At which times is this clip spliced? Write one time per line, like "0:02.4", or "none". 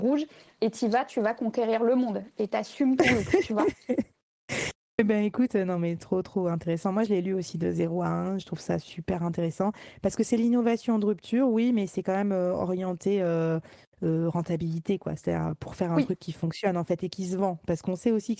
none